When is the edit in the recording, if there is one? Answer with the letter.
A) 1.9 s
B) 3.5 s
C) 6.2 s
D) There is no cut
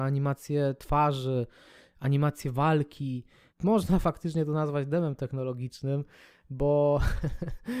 B